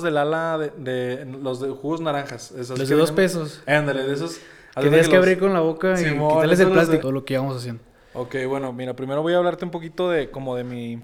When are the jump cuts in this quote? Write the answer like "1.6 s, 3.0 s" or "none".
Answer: 7.0 s